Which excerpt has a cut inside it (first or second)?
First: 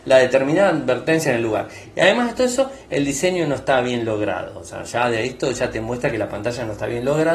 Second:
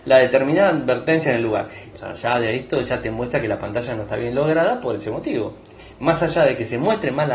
second